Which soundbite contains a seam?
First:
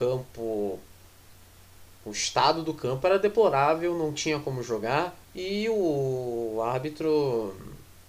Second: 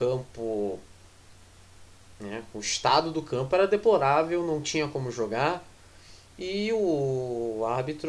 first; 2 cuts; at 2.0 s, 5.2 s

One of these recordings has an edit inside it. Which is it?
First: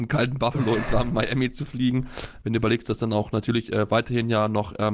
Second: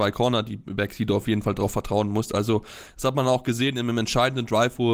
first; 1 cut; at 2.4 s

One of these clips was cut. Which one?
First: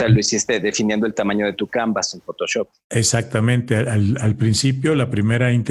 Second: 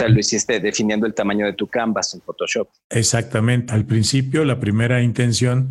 second; 1 cut; at 3.7 s

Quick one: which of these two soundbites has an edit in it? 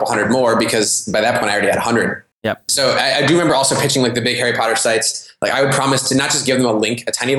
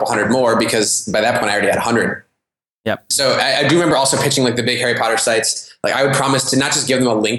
first; 1 cut; at 2.3 s

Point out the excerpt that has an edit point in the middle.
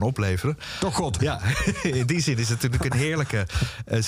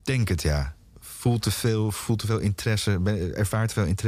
first; 1 cut; at 1.2 s

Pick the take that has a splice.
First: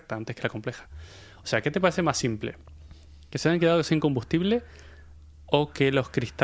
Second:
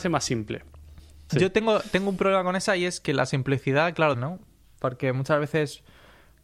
second; 2 cuts; at 1.3 s, 4.1 s

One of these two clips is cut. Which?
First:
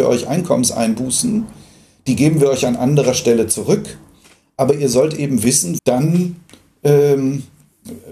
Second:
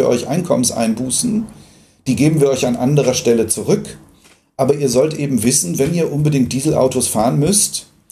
first; 1 cut; at 5.8 s

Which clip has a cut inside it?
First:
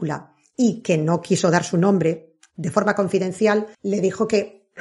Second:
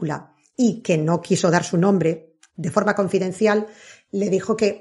first; 1 cut; at 3.7 s

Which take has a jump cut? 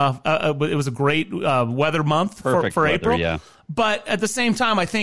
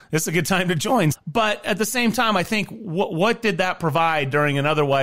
second; 1 cut; at 1.1 s

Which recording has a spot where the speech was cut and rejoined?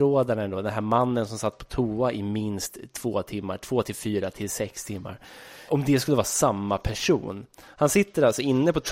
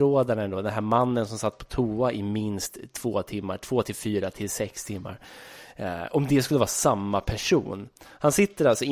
first; 1 cut; at 5.7 s

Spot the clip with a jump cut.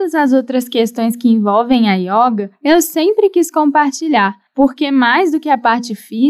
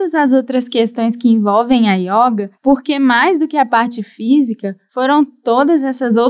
second; 1 cut; at 2.6 s

